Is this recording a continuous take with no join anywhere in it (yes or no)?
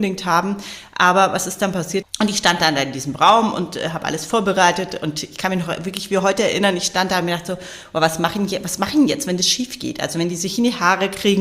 no